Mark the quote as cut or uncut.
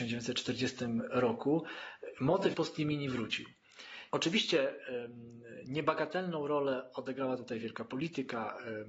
cut